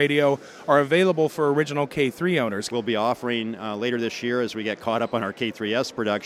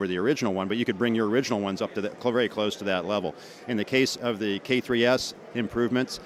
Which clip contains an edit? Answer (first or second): first